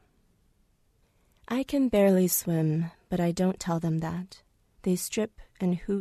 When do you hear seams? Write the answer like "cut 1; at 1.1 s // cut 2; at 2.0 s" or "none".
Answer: cut 1; at 4.8 s